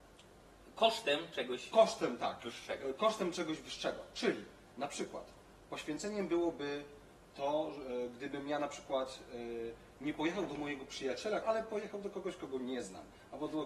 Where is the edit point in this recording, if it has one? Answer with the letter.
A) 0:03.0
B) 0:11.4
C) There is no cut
B